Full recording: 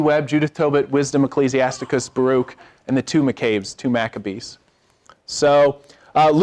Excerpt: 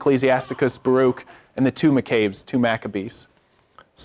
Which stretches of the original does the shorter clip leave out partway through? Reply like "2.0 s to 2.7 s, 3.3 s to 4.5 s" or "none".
none